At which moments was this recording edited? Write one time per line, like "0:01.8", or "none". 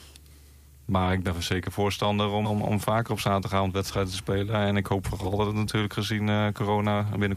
0:02.4